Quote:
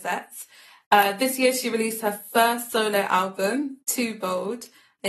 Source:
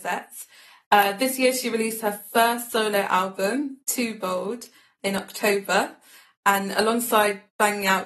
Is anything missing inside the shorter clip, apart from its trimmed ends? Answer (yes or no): no